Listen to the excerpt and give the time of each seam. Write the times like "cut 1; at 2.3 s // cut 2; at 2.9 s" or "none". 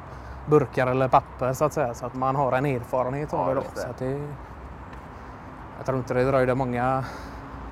cut 1; at 2.1 s